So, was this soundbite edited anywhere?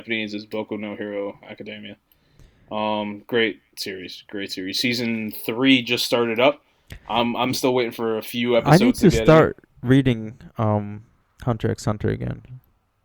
no; 0 cuts

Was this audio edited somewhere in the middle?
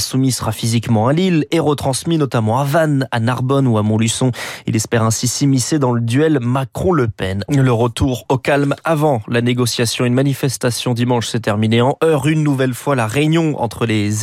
yes; 1 cut; at 7.5 s

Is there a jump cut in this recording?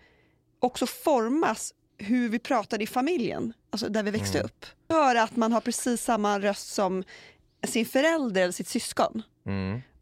yes; 1 cut; at 4.9 s

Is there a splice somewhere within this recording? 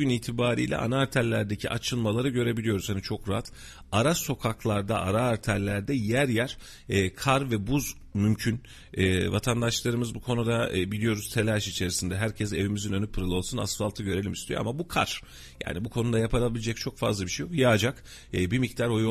yes; 1 cut; at 13.1 s

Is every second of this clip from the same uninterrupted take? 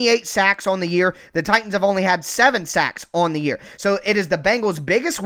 yes; 0 cuts

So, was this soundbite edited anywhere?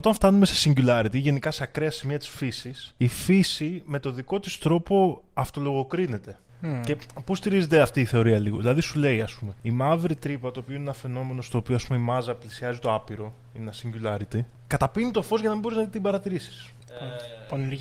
no; 0 cuts

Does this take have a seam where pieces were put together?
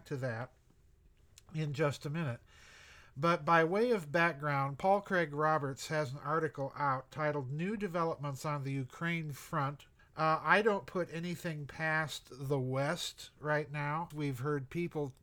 yes; 2 cuts; at 10.0 s, 14.1 s

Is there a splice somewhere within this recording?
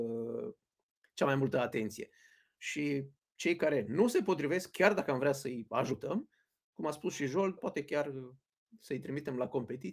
yes; 1 cut; at 7.6 s

